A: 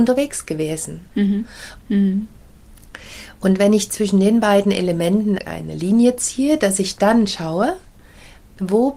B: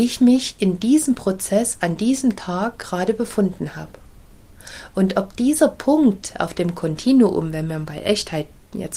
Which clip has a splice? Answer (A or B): A